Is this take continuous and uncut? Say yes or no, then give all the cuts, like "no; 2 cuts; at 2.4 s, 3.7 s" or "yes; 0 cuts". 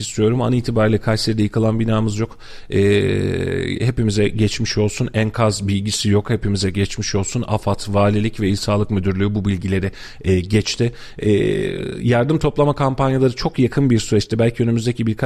yes; 0 cuts